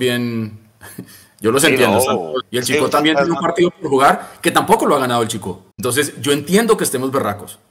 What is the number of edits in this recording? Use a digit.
2